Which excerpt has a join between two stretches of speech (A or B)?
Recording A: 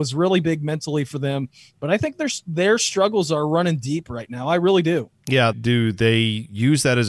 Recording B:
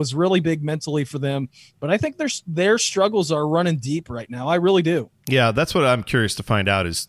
A